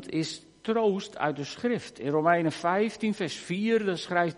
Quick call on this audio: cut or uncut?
uncut